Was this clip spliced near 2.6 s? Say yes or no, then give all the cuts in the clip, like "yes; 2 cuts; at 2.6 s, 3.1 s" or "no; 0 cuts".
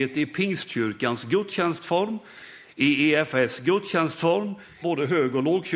yes; 2 cuts; at 2.6 s, 4.8 s